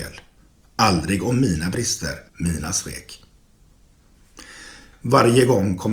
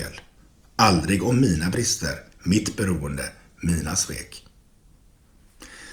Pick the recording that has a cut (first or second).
first